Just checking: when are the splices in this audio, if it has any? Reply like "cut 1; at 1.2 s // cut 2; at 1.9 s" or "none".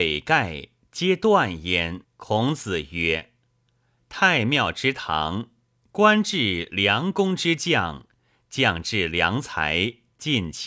cut 1; at 2.0 s